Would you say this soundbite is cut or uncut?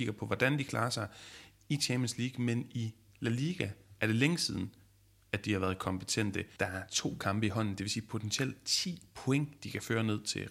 cut